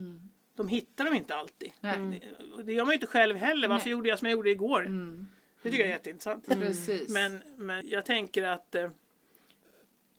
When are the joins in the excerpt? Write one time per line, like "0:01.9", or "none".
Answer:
0:04.8
0:06.4
0:07.8